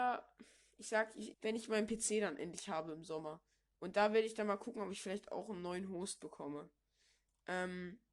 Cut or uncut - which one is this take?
cut